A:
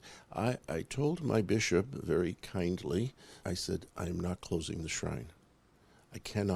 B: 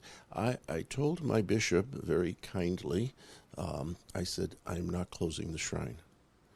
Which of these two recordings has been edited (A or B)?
A